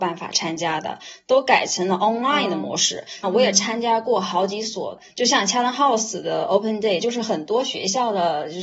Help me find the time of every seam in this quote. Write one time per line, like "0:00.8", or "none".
0:03.2
0:07.0